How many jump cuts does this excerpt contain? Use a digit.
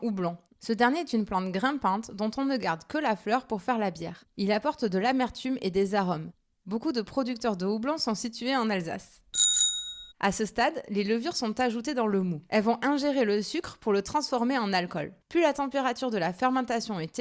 2